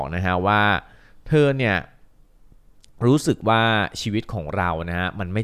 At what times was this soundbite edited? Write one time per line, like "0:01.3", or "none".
none

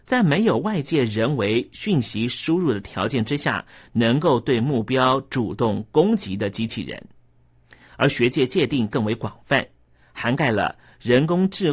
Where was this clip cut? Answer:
none

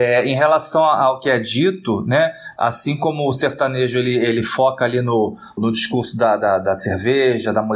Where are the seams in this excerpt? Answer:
0:05.6

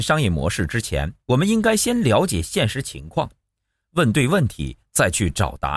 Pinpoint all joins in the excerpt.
0:01.2

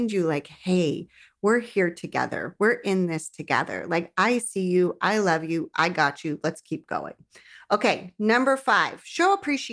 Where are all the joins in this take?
none

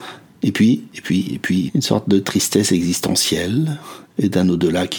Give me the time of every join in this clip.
0:01.7
0:04.0

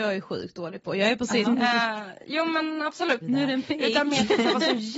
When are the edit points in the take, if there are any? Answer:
0:01.4
0:03.2

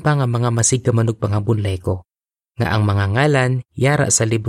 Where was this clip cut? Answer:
none

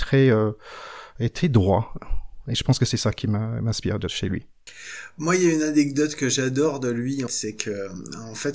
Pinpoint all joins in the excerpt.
0:07.3

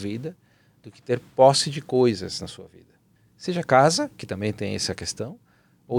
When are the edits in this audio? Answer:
0:03.1

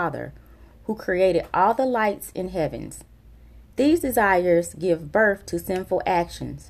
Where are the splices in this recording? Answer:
0:03.7

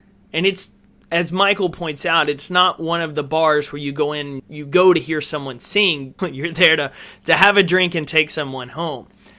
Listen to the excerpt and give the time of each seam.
0:04.4
0:06.2

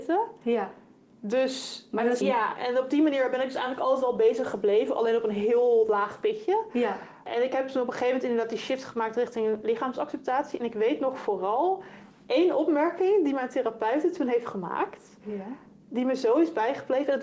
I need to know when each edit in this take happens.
0:02.2

